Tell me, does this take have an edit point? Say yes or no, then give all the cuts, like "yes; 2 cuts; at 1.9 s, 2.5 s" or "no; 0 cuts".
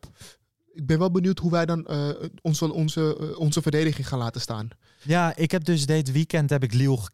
no; 0 cuts